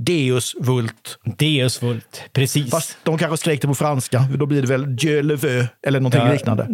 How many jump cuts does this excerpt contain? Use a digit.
0